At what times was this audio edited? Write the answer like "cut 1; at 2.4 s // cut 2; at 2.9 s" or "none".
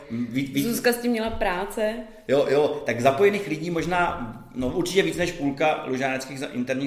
none